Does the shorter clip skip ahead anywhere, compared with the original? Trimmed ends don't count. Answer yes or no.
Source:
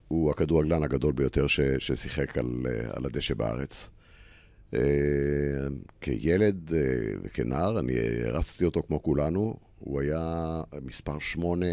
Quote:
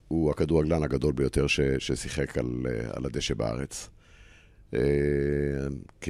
no